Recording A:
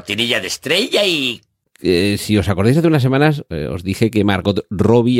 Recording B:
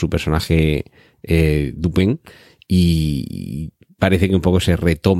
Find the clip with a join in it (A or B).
A